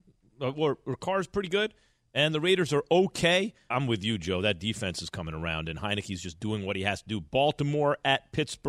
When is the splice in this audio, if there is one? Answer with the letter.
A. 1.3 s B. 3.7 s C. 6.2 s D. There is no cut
B